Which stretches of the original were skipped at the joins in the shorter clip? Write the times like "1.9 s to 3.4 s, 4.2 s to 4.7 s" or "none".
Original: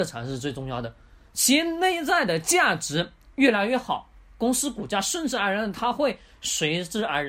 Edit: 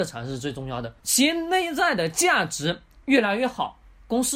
1.0 s to 1.3 s